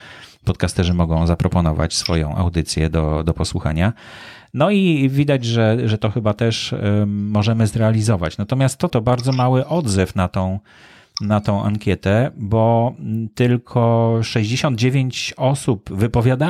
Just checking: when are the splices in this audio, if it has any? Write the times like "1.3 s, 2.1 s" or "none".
8.9 s